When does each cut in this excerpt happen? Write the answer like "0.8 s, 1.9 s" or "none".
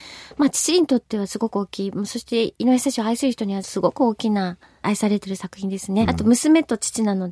6.1 s